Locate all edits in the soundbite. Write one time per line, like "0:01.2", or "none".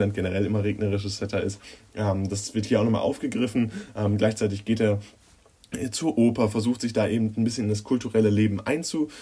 none